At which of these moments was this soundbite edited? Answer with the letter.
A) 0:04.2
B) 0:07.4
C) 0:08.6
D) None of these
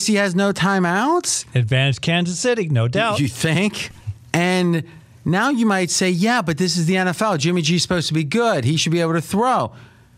A